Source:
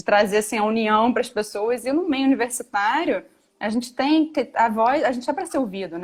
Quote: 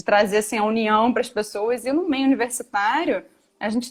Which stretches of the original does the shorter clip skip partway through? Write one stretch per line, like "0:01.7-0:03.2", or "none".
none